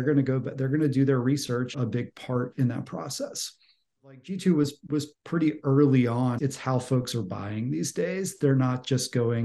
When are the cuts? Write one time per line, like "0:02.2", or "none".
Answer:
0:01.7
0:06.4